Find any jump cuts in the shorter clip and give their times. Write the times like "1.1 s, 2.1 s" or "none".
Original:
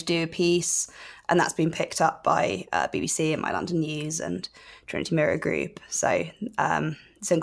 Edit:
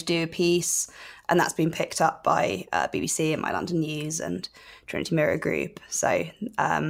none